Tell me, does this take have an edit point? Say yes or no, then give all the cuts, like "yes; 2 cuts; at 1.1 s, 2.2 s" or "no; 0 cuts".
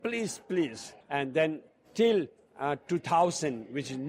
yes; 1 cut; at 1.0 s